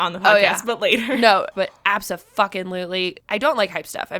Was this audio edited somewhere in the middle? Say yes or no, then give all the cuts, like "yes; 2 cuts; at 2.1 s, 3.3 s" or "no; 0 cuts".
yes; 2 cuts; at 1.5 s, 3.2 s